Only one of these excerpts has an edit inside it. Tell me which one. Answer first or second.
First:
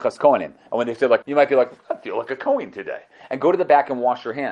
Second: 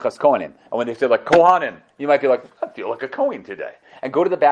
first